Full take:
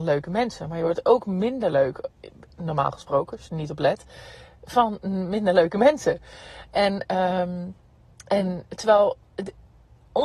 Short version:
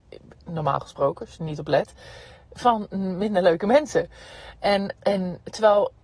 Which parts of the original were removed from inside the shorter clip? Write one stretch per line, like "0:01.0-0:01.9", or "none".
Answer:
0:07.1-0:08.2